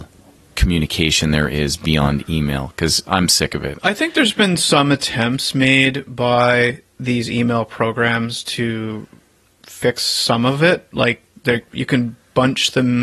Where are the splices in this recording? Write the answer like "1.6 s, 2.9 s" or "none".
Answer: 3.8 s, 11.7 s